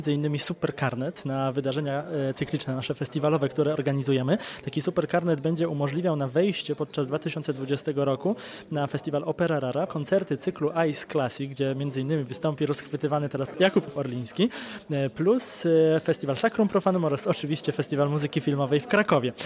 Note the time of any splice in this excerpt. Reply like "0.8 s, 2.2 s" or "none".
9.9 s